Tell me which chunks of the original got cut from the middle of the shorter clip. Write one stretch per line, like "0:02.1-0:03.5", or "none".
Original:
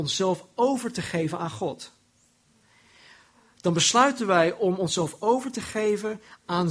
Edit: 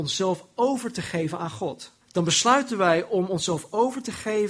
0:02.0-0:03.5